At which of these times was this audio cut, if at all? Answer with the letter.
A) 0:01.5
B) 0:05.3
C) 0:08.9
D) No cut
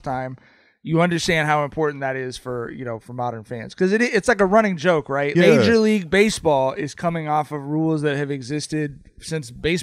B